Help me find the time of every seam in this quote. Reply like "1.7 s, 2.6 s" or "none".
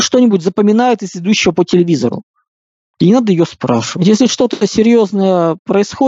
2.9 s